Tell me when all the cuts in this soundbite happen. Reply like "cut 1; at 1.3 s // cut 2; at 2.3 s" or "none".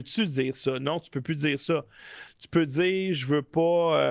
cut 1; at 2.3 s